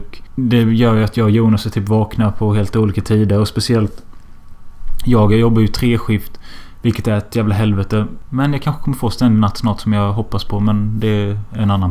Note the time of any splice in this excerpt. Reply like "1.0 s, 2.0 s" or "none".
none